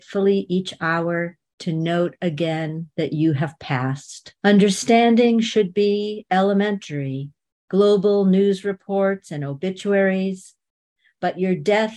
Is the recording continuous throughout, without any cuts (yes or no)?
no